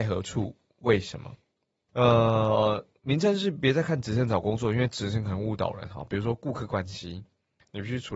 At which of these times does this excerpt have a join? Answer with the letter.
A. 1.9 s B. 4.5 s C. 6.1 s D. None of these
A